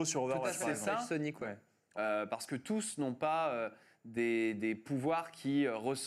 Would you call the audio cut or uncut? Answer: cut